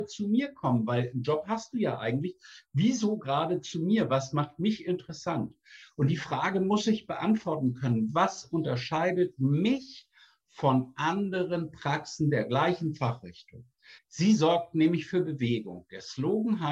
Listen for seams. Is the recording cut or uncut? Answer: cut